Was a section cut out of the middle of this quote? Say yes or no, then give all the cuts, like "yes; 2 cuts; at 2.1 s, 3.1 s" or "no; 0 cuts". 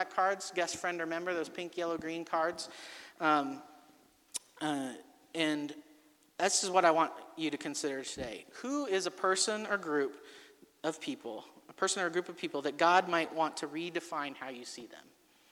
no; 0 cuts